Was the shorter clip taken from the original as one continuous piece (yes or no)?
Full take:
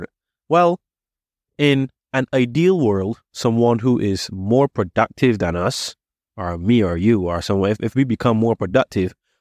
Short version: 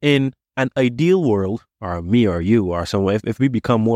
no